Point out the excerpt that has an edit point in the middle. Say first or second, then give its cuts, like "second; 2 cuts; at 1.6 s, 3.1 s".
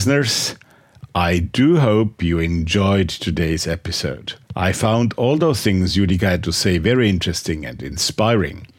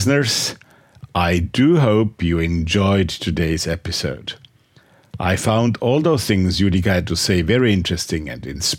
first; 1 cut; at 4.4 s